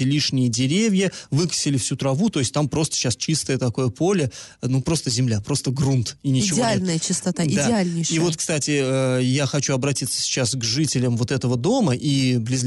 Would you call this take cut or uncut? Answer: uncut